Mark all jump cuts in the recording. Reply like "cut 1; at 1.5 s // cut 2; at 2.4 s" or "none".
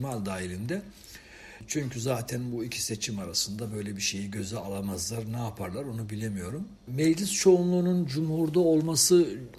none